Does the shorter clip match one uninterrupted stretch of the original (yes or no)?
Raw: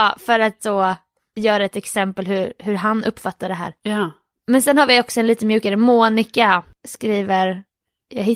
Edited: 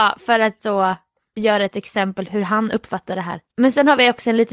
no